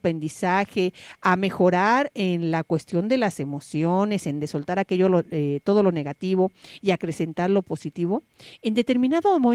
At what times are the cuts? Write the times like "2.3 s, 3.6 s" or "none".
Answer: none